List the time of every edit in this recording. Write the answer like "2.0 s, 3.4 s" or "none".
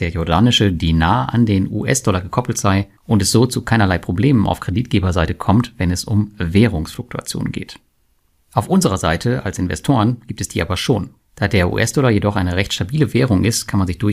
3.0 s